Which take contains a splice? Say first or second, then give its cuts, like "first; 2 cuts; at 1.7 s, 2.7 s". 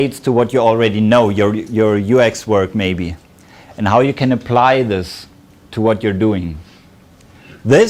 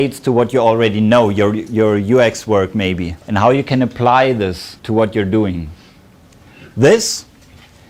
second; 2 cuts; at 3.2 s, 4.8 s